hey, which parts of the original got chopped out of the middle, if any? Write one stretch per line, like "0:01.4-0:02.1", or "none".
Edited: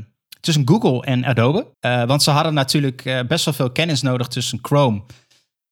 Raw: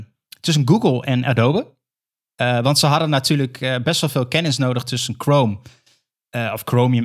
0:01.7-0:02.3